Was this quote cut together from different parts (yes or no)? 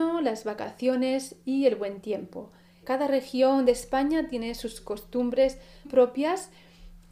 yes